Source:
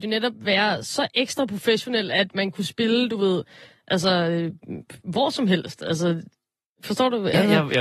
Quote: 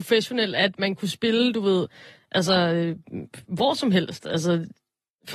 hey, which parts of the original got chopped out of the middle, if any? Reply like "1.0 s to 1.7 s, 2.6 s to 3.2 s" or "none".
none